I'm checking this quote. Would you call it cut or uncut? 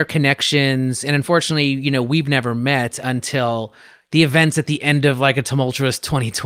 uncut